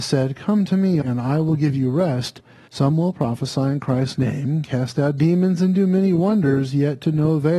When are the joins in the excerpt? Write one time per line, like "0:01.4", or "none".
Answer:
0:01.0
0:02.7